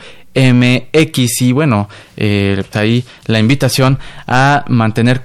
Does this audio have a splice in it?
yes; 1 cut; at 2.7 s

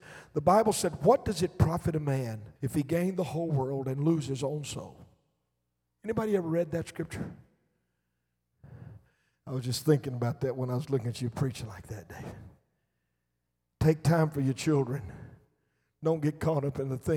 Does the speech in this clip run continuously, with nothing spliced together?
no; 2 cuts; at 2.6 s, 9.3 s

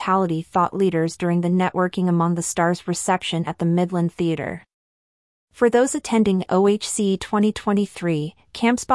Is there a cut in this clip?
no; 0 cuts

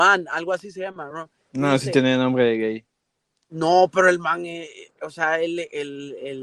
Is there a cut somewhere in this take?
no; 0 cuts

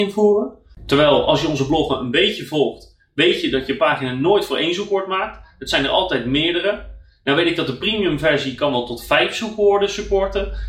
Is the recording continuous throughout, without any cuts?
yes; 0 cuts

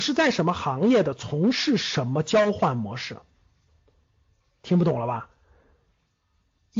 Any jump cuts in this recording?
no; 0 cuts

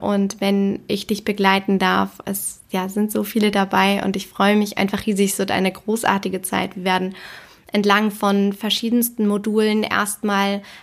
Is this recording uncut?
yes; 0 cuts

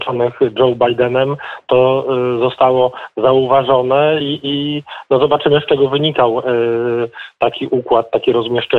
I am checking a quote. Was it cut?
no; 0 cuts

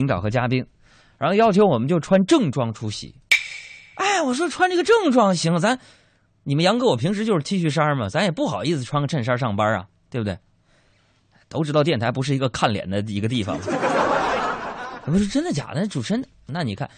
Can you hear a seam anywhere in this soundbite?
no; 0 cuts

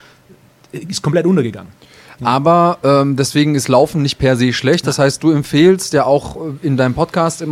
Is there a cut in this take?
no; 0 cuts

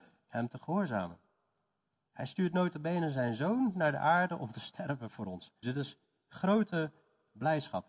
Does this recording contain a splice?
yes; 2 cuts; at 2.1 s, 5.6 s

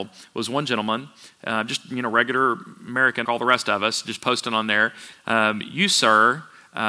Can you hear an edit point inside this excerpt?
yes; 2 cuts; at 3.2 s, 5.1 s

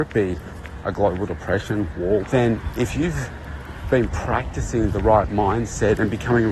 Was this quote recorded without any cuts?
no; 1 cut; at 2.2 s

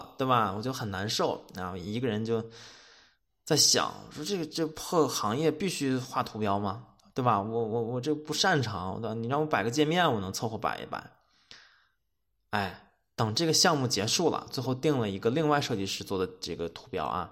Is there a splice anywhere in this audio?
no; 0 cuts

